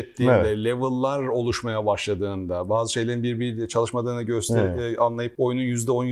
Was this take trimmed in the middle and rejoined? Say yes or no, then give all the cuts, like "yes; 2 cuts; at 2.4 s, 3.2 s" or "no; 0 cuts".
no; 0 cuts